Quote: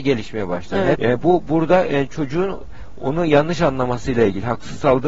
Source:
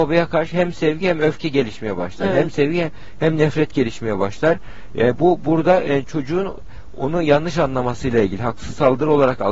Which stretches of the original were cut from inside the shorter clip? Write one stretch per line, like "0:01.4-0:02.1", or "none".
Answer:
0:02.4-0:04.9